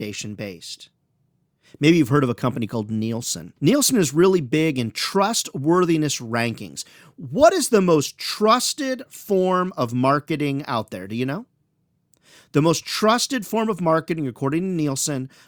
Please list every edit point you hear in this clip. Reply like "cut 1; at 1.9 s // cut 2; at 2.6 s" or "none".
cut 1; at 3.6 s

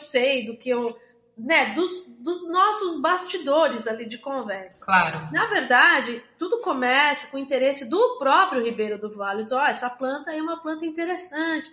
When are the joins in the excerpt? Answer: none

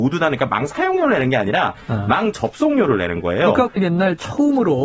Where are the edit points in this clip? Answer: cut 1; at 3.8 s

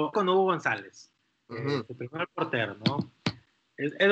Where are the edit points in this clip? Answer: none

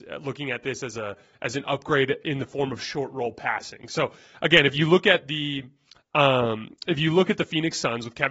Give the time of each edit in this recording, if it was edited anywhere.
none

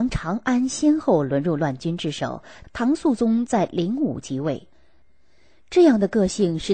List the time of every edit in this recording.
cut 1; at 2.6 s // cut 2; at 5.0 s

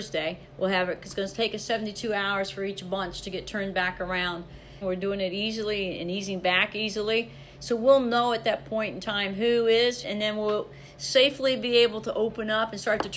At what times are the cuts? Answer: cut 1; at 4.8 s // cut 2; at 10.0 s

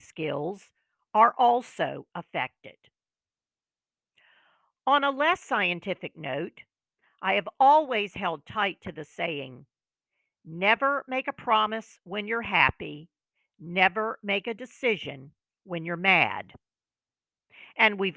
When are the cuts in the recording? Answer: none

